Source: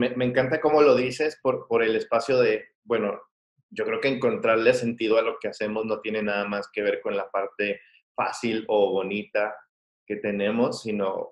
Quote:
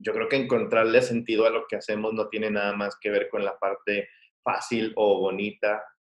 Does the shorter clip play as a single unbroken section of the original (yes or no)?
yes